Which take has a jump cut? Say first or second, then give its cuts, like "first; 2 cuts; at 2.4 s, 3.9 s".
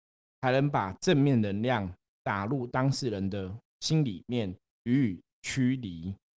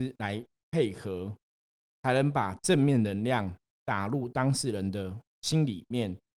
first; 1 cut; at 4.7 s